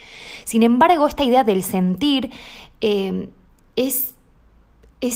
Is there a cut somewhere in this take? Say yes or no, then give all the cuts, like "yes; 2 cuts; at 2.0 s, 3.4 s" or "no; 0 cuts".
no; 0 cuts